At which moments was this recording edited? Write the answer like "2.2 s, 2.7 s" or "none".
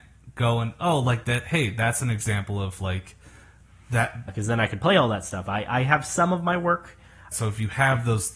4.3 s, 7.3 s